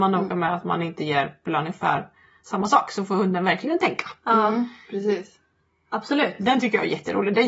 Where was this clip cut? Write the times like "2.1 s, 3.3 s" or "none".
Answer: none